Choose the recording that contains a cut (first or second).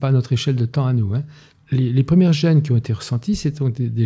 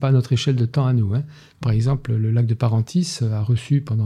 second